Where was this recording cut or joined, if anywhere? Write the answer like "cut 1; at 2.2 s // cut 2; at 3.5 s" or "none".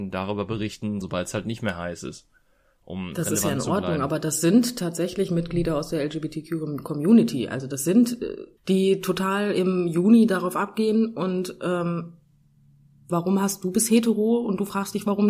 cut 1; at 1.0 s // cut 2; at 8.6 s // cut 3; at 13.1 s